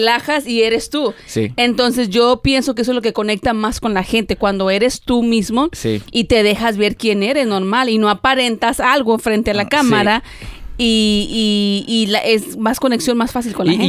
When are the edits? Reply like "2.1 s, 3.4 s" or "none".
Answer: none